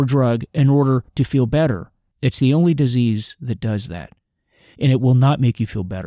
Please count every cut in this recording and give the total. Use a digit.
2